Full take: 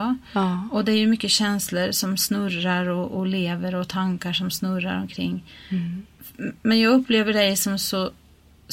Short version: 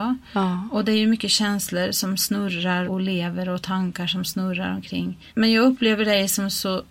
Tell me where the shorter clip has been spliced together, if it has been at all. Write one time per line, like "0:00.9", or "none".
0:02.8
0:05.3